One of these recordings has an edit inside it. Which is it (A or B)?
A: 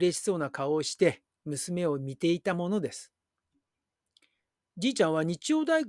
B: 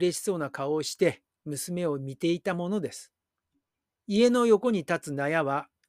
B